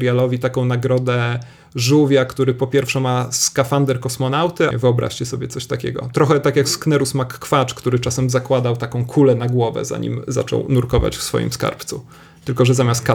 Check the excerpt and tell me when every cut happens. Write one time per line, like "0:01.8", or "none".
0:04.7